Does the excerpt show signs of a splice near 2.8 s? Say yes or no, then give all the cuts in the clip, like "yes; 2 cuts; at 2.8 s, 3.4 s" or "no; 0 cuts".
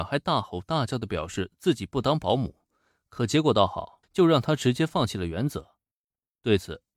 no; 1 cut; at 4.0 s